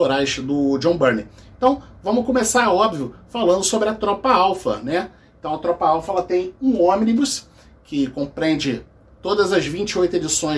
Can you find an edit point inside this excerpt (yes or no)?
no